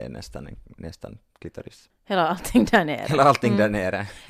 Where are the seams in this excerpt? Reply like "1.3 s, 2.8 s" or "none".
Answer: 1.9 s